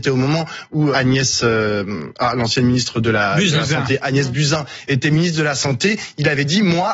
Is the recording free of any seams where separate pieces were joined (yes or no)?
no